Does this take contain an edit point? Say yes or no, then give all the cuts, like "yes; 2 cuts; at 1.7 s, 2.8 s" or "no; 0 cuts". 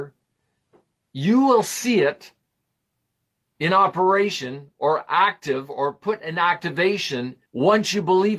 yes; 1 cut; at 7.5 s